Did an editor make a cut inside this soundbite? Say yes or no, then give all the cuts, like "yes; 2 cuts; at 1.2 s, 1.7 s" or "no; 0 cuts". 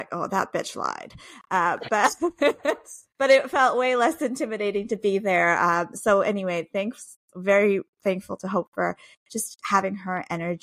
no; 0 cuts